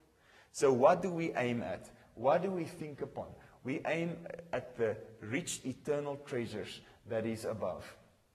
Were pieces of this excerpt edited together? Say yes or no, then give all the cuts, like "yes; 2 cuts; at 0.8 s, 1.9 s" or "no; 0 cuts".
no; 0 cuts